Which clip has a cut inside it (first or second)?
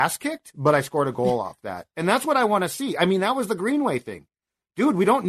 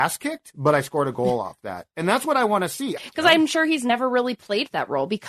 second